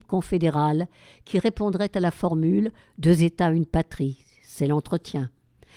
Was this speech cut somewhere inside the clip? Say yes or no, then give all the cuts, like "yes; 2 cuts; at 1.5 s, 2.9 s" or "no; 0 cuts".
no; 0 cuts